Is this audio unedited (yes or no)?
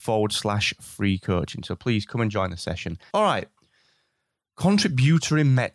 no